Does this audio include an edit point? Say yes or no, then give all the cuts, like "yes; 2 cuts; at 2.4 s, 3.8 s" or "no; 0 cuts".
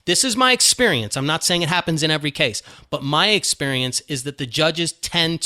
no; 0 cuts